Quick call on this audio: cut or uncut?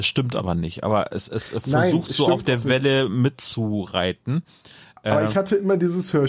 uncut